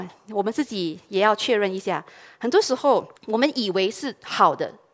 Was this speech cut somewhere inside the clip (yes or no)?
yes